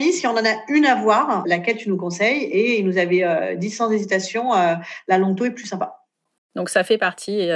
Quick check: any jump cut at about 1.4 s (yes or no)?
no